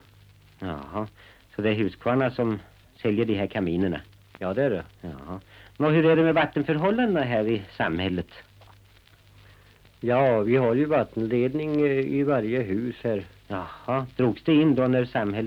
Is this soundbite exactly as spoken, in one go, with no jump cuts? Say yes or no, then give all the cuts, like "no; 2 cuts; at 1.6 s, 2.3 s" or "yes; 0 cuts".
yes; 0 cuts